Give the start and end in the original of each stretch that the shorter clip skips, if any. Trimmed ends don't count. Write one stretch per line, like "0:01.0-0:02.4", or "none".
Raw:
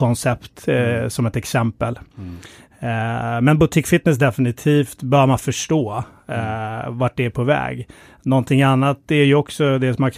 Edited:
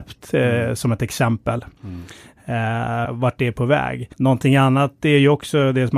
0:03.4-0:06.8
0:07.9-0:08.2

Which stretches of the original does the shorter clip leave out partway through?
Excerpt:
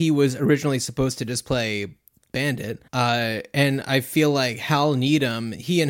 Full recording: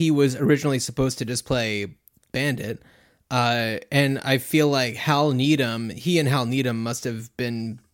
0:02.9-0:03.2

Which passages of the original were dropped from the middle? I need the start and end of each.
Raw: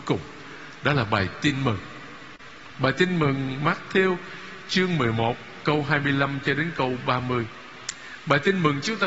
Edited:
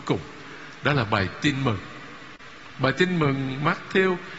none

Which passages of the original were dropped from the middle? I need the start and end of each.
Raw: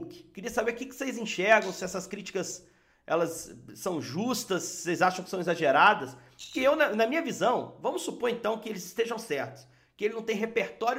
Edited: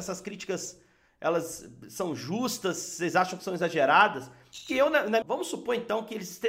0:07.1-0:07.8

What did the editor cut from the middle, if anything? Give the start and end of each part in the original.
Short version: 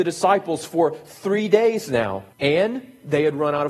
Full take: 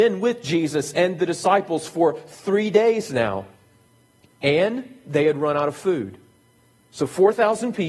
0:03.5-0:04.3

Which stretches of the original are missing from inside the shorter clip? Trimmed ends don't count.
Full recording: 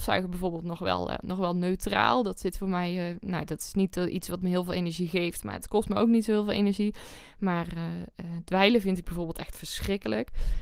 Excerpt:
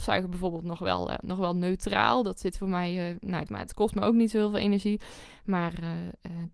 0:03.5-0:05.4

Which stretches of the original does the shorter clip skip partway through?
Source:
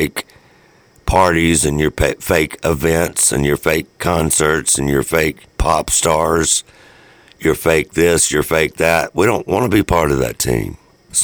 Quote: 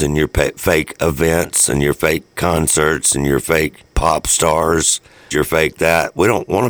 0:06.9-0:08.3

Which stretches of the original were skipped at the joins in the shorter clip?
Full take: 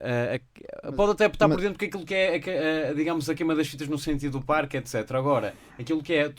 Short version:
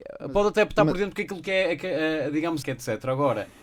0:03.3-0:04.7

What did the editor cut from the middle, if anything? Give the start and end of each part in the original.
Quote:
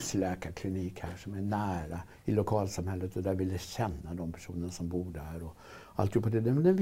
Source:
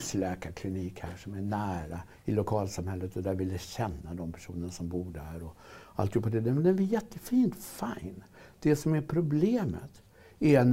none

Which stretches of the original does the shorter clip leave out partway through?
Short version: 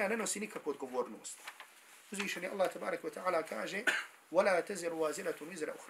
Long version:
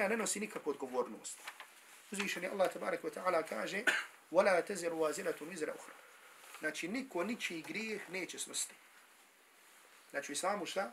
none

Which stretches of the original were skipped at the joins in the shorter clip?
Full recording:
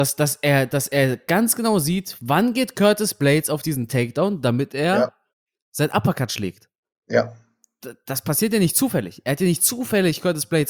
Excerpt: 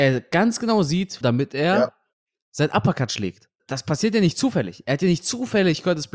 0:02.2-0:04.4
0:06.8-0:08.0

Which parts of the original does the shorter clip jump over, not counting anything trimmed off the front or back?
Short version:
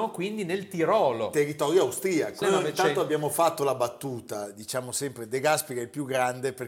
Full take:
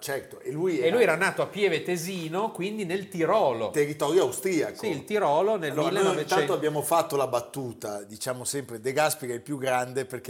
0:04.8-0:05.9

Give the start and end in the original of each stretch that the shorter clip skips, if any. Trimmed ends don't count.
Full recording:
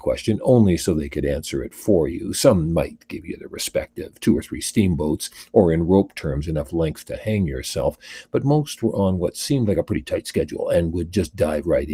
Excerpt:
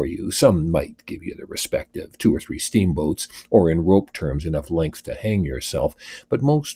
none

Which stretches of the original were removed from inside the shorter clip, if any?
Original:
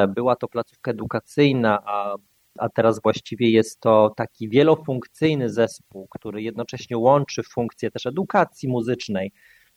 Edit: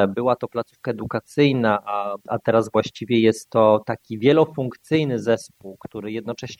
0:02.2-0:02.5

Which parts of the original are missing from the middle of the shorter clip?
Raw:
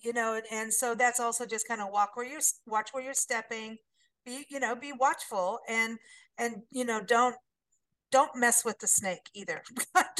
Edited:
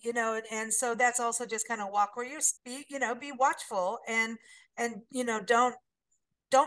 0:02.6-0:04.2

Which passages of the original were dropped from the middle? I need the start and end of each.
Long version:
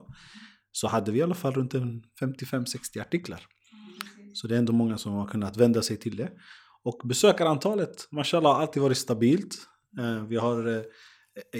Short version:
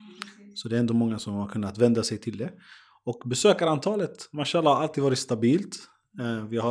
none

